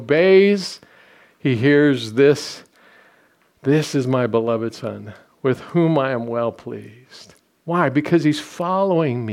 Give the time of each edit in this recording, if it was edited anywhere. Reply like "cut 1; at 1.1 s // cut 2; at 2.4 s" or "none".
none

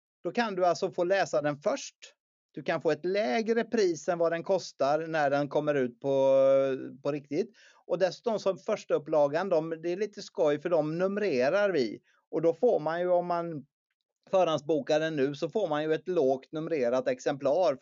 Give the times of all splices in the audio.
none

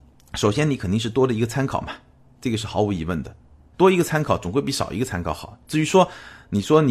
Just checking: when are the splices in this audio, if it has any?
none

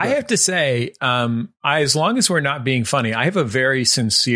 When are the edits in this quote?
none

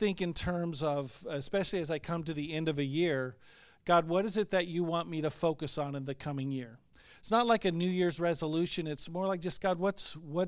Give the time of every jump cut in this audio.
none

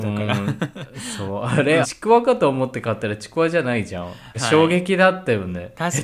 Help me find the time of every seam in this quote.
cut 1; at 1.8 s // cut 2; at 4.3 s

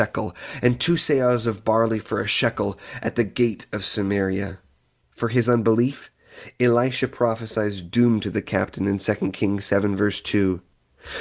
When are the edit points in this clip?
cut 1; at 5.0 s

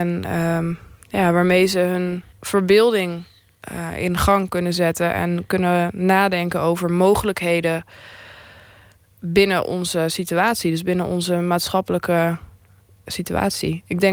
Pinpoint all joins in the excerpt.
cut 1; at 2.3 s

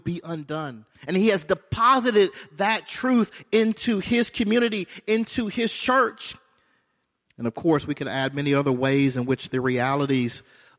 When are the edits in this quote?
cut 1; at 0.9 s // cut 2; at 7.2 s

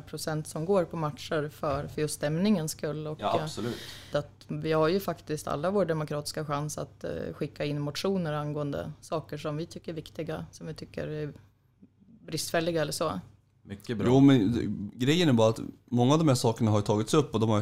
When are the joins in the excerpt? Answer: cut 1; at 4.1 s

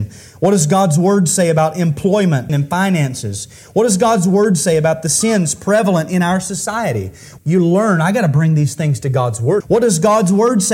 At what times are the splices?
cut 1; at 2.5 s // cut 2; at 7.4 s // cut 3; at 9.6 s

